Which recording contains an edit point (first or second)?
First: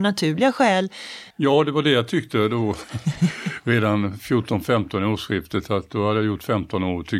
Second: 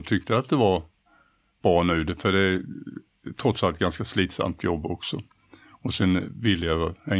first